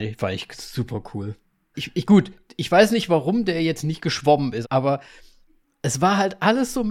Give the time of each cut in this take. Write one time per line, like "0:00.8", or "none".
0:01.7
0:04.6